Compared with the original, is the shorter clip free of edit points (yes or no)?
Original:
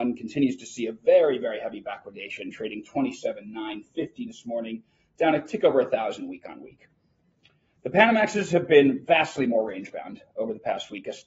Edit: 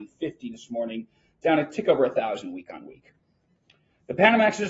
yes